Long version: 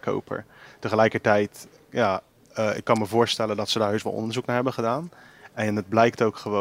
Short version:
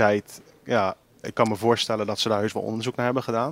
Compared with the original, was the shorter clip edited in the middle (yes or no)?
yes